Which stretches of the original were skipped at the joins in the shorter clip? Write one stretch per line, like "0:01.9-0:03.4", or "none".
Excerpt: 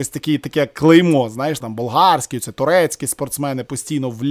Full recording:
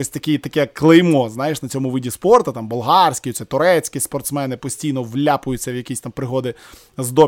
0:01.6-0:02.5